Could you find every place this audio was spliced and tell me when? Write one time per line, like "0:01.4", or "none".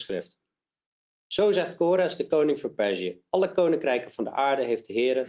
none